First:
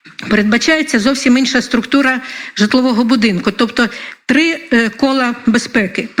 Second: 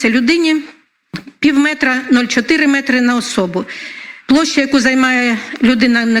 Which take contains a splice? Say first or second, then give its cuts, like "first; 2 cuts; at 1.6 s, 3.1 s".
second; 1 cut; at 4.2 s